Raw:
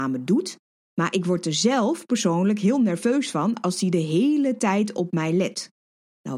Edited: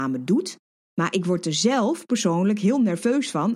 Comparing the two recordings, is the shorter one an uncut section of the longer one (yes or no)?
yes